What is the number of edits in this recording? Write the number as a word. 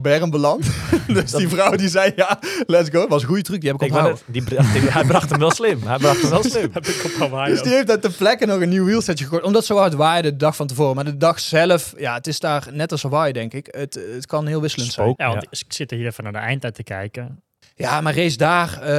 two